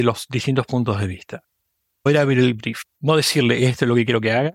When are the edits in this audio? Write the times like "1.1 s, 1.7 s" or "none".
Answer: none